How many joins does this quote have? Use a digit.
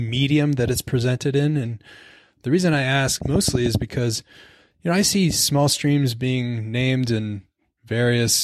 1